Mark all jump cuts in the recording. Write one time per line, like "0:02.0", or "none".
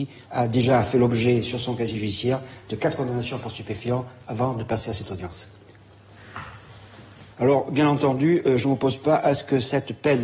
0:07.3